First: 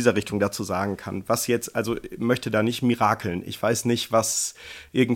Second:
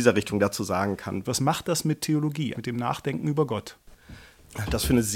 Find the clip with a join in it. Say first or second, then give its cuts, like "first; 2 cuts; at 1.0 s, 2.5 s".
second; 2 cuts; at 1.2 s, 2.5 s